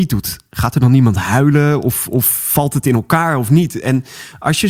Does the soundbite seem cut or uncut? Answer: uncut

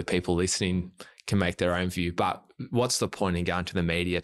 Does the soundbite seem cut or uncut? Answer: uncut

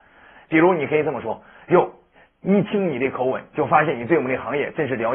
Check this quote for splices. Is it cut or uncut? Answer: uncut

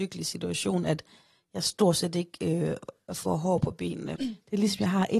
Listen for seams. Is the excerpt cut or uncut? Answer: cut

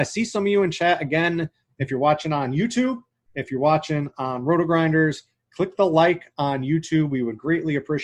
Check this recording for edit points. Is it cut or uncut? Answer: uncut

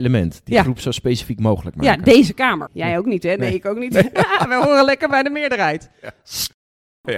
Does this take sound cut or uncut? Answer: cut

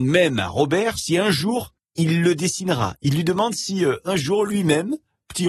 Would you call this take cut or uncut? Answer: uncut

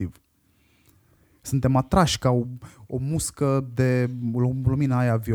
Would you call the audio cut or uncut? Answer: uncut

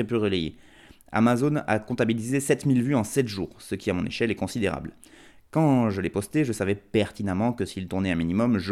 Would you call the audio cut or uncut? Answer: uncut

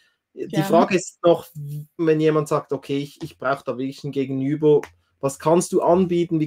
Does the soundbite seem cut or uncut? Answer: cut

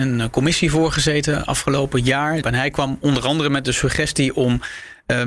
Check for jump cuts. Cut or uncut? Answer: cut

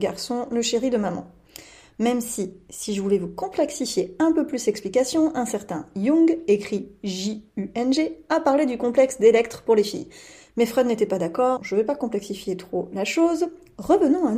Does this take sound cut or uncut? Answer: cut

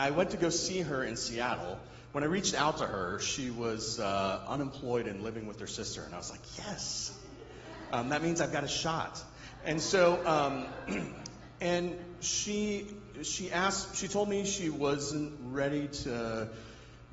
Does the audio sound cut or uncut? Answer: uncut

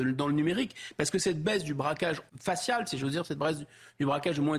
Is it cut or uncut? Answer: cut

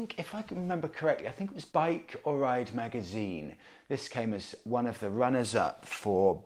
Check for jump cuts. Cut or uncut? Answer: cut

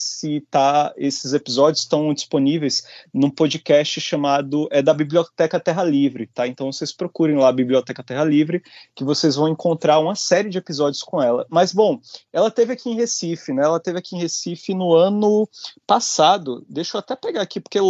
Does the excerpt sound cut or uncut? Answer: uncut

